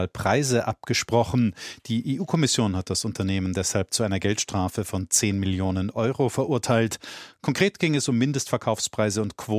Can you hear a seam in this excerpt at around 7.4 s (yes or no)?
no